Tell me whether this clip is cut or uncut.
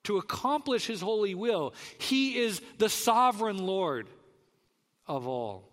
uncut